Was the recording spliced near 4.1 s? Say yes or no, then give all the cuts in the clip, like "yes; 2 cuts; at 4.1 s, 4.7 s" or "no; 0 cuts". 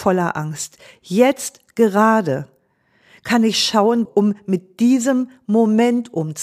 yes; 1 cut; at 4.1 s